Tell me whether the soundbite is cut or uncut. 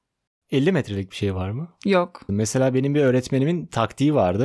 cut